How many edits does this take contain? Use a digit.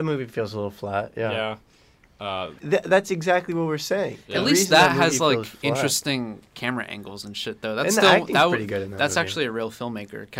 1